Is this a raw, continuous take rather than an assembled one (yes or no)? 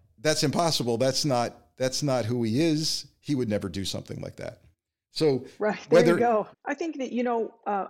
no